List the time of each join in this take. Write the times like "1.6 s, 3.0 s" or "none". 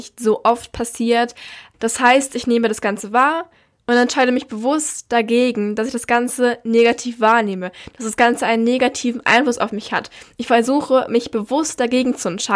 1.7 s